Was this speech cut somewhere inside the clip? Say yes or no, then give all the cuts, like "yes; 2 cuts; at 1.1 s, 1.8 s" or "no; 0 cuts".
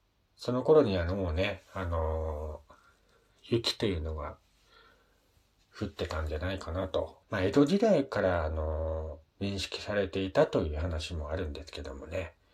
yes; 2 cuts; at 7.2 s, 9.3 s